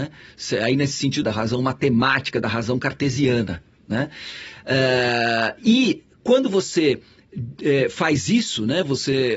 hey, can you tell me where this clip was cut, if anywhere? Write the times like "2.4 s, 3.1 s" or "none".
1.2 s